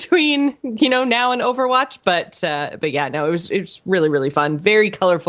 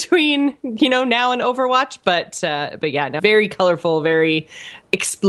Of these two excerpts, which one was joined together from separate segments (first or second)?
second